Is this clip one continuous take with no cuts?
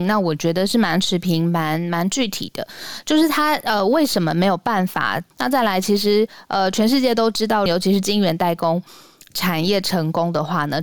no; 2 cuts; at 5.3 s, 7.7 s

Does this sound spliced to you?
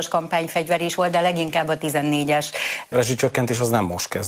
yes; 1 cut; at 2.9 s

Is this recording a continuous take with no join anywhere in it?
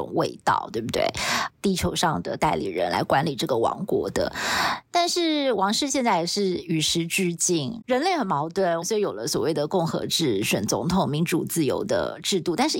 no; 3 cuts; at 1.5 s, 7.8 s, 8.8 s

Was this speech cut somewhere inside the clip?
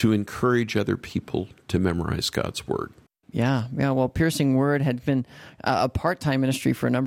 no; 0 cuts

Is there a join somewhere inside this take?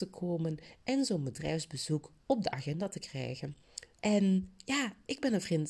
yes; 1 cut; at 3.9 s

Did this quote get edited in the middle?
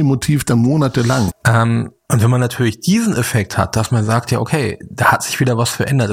yes; 1 cut; at 1.3 s

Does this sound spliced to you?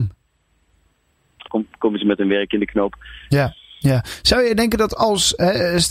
yes; 2 cuts; at 1.5 s, 3.3 s

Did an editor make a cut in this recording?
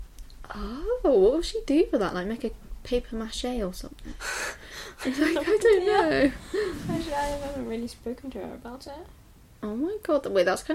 no; 0 cuts

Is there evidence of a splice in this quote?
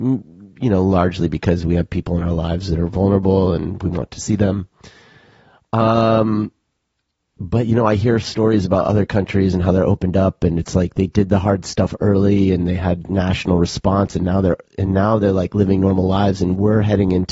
no; 0 cuts

